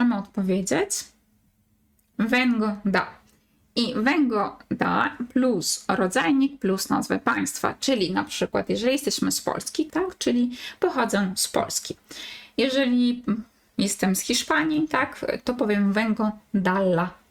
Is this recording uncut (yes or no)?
no